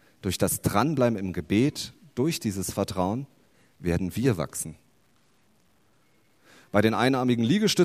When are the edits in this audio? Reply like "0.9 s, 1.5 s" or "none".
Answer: none